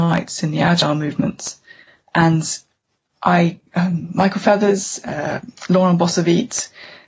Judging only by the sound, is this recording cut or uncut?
uncut